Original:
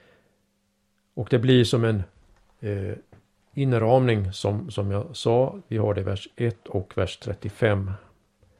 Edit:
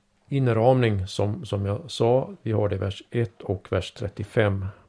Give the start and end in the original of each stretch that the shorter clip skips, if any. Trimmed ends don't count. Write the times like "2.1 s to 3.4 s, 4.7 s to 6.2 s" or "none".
none